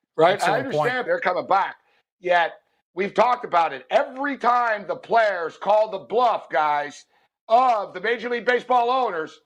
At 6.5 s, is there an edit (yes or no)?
no